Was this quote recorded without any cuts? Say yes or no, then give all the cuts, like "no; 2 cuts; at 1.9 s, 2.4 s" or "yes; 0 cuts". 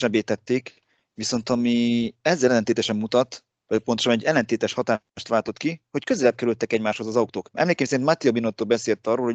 no; 1 cut; at 7.5 s